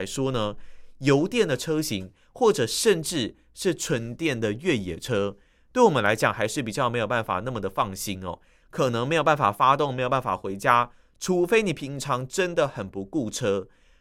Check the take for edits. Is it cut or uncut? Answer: cut